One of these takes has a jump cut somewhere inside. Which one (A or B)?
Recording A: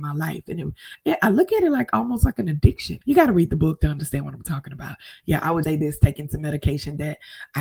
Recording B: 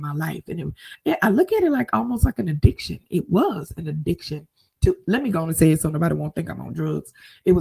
A